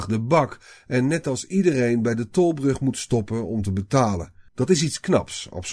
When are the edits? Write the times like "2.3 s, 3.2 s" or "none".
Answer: 4.5 s